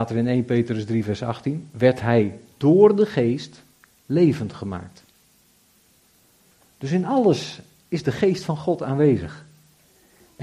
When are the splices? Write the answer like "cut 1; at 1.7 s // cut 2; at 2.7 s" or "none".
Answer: none